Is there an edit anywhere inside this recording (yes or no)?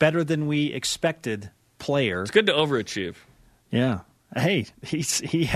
no